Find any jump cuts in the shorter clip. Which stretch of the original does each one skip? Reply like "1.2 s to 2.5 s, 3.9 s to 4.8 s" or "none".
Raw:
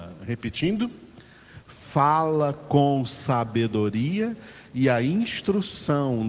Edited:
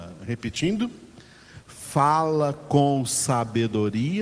none